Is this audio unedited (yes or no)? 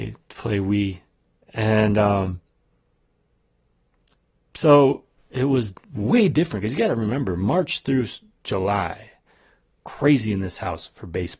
no